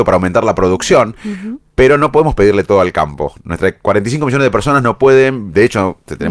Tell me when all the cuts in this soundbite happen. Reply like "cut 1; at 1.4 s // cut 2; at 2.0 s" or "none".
none

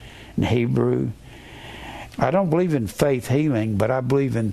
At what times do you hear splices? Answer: cut 1; at 2.1 s

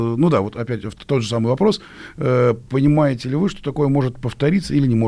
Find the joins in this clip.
none

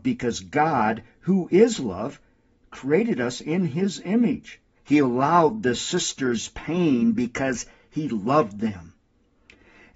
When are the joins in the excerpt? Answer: cut 1; at 4.7 s

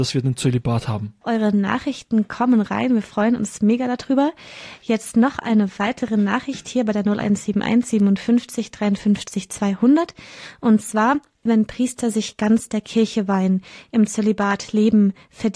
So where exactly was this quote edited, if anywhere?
cut 1; at 1.2 s // cut 2; at 11.5 s

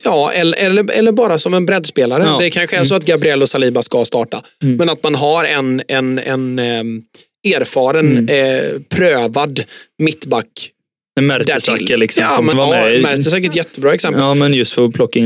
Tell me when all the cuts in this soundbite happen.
cut 1; at 12.5 s

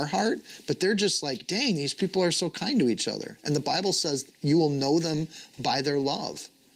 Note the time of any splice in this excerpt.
none

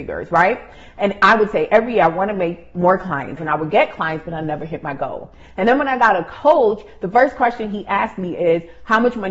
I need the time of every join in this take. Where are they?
cut 1; at 3.4 s

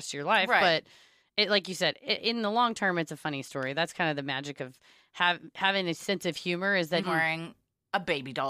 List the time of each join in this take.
cut 1; at 7.0 s

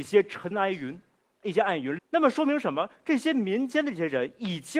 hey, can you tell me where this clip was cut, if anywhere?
cut 1; at 2.0 s

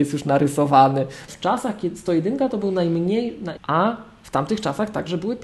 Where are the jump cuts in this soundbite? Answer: cut 1; at 1.3 s // cut 2; at 3.6 s

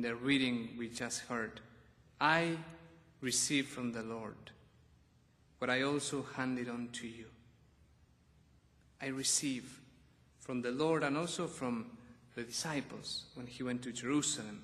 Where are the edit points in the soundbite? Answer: none

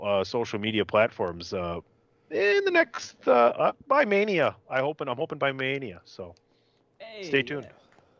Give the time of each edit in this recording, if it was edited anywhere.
none

